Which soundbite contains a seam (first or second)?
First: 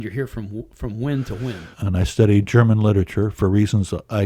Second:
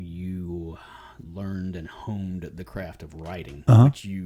first